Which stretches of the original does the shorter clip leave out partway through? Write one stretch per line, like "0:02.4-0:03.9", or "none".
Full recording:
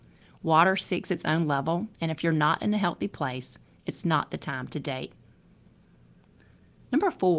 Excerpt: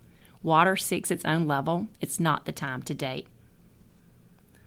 0:02.0-0:03.8